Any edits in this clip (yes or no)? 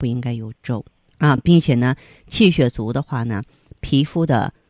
no